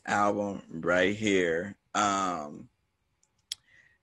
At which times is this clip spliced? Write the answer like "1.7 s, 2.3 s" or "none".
1.9 s